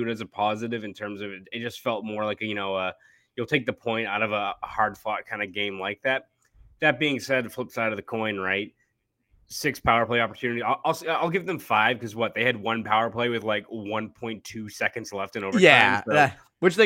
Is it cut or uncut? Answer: uncut